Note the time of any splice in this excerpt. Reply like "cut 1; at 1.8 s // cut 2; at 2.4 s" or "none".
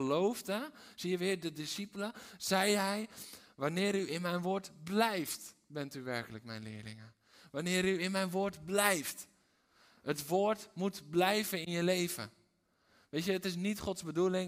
none